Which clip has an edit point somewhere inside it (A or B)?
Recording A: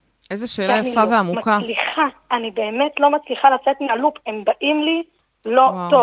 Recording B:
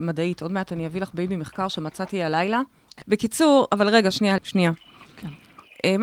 B